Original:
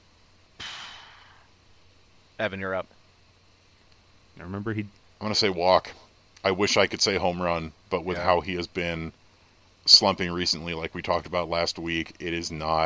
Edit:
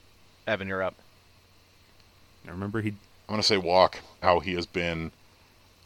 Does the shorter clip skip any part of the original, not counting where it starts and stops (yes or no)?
yes